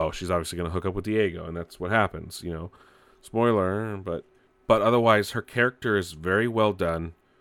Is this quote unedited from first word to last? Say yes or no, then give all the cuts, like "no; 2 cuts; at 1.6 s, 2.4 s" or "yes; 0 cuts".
yes; 0 cuts